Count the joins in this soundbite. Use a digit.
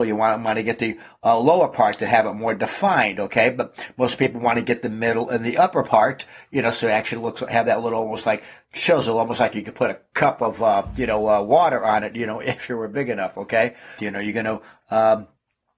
1